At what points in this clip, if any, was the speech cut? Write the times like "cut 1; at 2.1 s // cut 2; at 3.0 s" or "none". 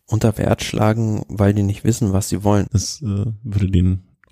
cut 1; at 2.7 s

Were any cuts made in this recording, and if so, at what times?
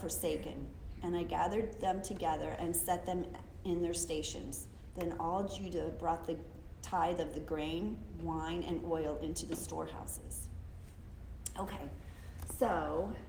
none

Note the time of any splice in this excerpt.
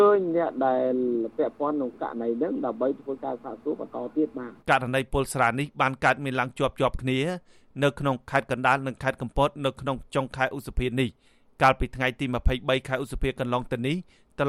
cut 1; at 4.6 s

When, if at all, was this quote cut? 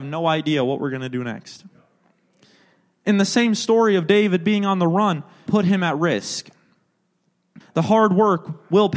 cut 1; at 5.5 s // cut 2; at 7.6 s

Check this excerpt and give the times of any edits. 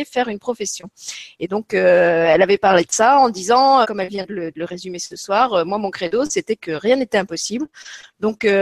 cut 1; at 3.8 s

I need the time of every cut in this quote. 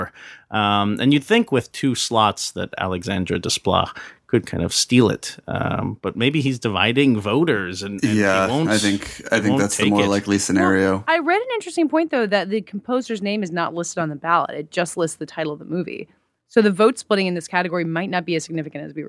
none

